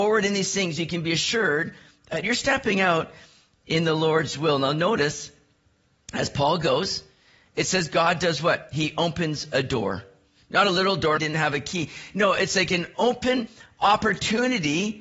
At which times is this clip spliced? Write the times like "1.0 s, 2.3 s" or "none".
11.2 s